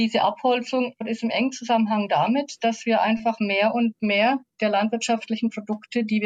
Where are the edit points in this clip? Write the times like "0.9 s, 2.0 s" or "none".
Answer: none